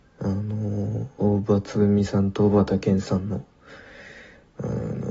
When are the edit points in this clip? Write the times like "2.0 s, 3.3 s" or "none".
none